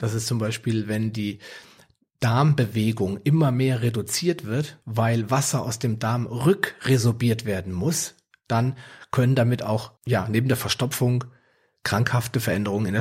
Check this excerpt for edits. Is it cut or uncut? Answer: cut